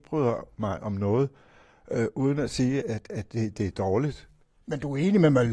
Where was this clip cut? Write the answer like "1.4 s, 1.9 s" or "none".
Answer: 2.8 s, 4.6 s